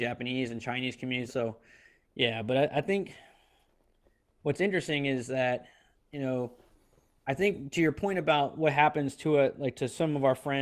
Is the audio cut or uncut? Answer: cut